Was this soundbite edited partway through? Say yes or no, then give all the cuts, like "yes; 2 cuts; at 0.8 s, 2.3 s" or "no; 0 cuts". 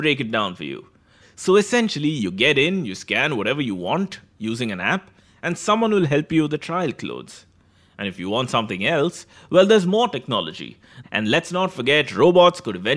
yes; 2 cuts; at 1.2 s, 11.0 s